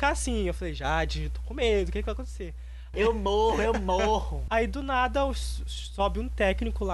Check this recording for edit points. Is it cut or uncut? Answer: cut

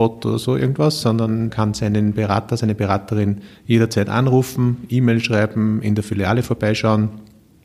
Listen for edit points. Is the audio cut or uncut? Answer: cut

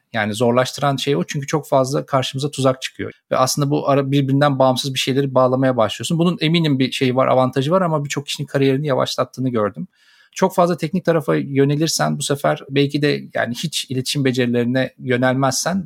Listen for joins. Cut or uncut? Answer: cut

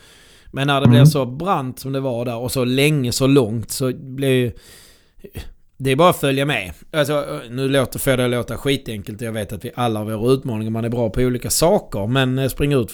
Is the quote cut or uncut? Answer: uncut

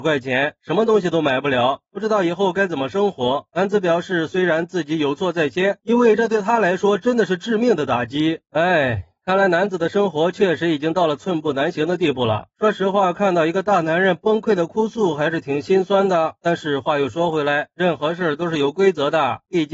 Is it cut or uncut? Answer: cut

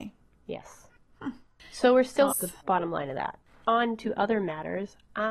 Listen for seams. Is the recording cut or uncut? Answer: cut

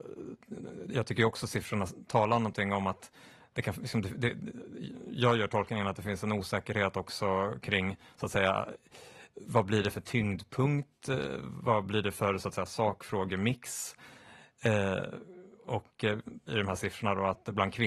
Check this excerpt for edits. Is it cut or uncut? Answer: cut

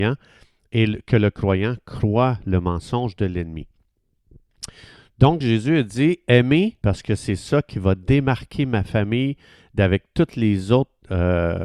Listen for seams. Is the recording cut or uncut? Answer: cut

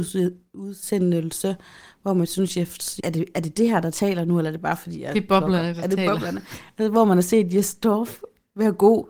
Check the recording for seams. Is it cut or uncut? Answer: cut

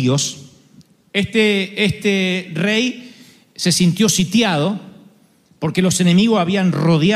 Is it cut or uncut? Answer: uncut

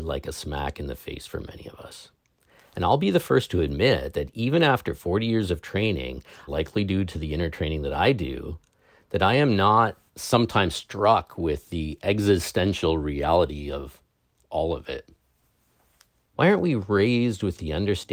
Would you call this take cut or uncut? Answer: cut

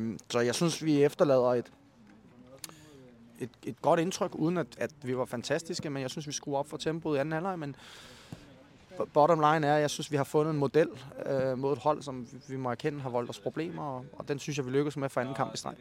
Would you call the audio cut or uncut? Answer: uncut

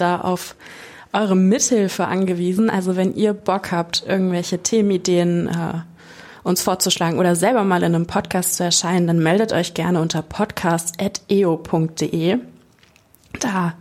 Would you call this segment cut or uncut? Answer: uncut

